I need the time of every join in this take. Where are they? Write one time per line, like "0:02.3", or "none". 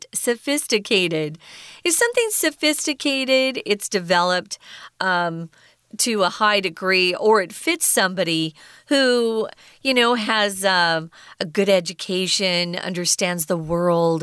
none

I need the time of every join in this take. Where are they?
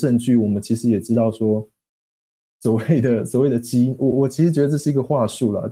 0:04.1

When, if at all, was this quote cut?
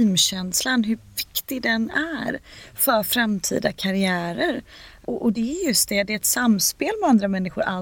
0:05.0

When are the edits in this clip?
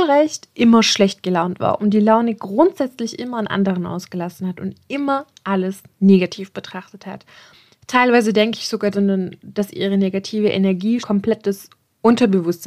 0:08.9
0:11.0

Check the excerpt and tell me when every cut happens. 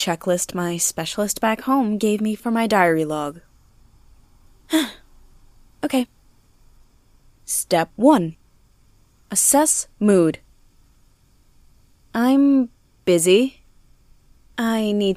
none

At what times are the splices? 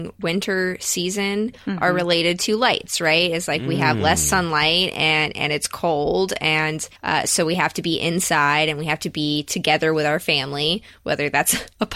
0:07.0

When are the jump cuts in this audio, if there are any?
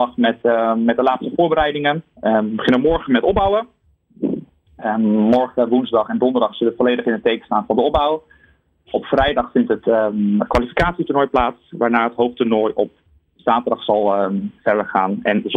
none

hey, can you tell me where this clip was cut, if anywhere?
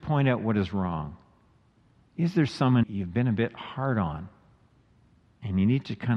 0:02.8

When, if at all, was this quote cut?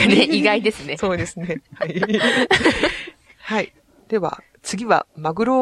none

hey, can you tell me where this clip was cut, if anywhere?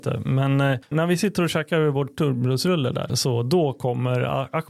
0:00.9
0:03.1

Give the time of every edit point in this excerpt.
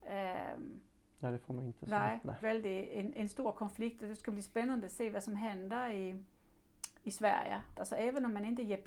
0:02.4
0:07.7

